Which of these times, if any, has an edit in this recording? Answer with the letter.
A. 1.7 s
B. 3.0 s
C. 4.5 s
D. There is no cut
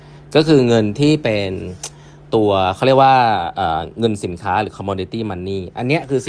D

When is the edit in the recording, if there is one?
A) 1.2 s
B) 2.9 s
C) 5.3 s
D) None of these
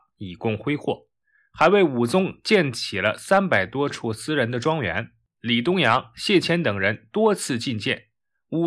C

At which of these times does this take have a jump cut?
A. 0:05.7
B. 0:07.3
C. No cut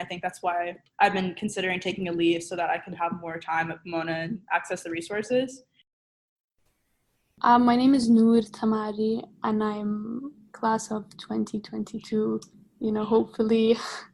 C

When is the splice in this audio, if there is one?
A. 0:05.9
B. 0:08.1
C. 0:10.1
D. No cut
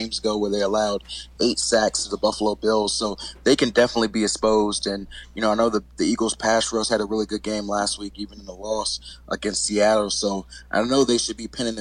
D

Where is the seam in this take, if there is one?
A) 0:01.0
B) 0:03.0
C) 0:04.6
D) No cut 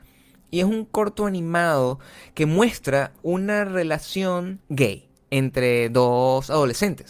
C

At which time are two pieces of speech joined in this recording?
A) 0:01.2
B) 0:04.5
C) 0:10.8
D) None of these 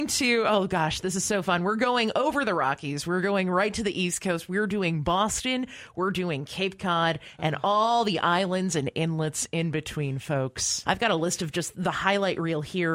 C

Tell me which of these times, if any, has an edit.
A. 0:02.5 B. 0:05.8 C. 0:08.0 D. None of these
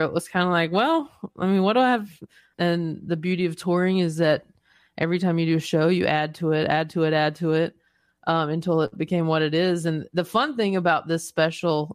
A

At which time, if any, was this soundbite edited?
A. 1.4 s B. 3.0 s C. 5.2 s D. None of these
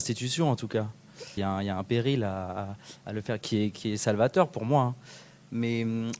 A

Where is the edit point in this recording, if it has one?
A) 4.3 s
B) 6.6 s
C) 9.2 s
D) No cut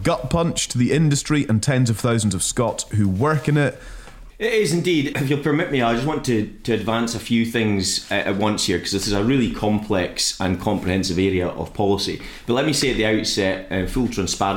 A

